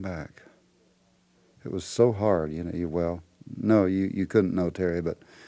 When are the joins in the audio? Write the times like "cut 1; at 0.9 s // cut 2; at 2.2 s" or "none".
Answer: none